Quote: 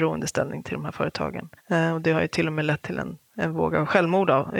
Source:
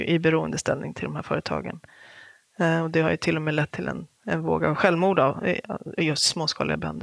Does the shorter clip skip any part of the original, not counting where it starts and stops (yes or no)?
yes